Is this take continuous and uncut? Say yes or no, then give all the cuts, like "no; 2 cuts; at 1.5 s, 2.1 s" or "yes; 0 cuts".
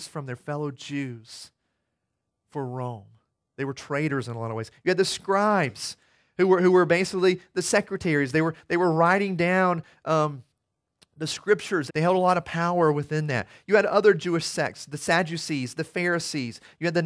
no; 1 cut; at 11.9 s